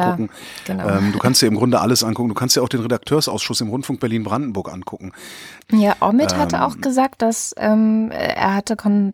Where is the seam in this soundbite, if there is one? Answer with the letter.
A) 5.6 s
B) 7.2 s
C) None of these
A